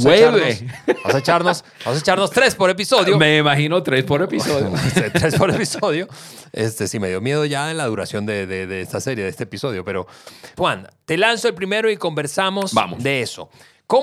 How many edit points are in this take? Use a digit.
1